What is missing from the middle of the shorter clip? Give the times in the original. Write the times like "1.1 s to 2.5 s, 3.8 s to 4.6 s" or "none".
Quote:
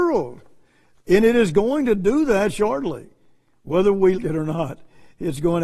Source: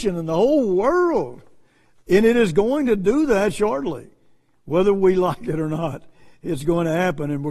5.1 s to 5.4 s